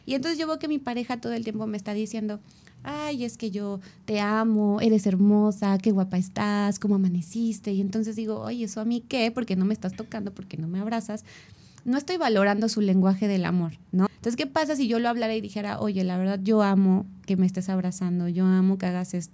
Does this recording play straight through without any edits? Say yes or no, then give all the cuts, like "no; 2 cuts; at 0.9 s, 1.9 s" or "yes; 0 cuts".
no; 1 cut; at 14.1 s